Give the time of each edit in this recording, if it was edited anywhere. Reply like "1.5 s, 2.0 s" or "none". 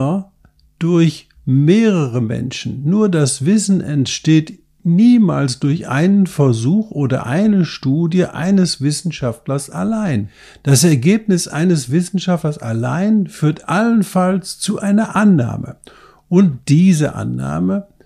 none